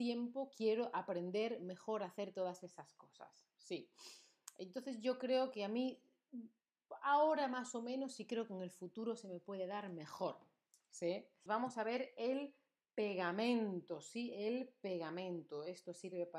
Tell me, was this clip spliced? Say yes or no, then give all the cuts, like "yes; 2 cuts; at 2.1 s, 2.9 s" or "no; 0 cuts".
yes; 1 cut; at 11.5 s